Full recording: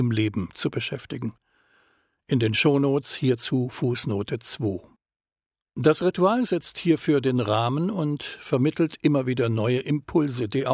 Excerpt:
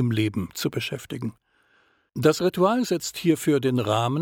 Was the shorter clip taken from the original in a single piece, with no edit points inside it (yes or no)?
no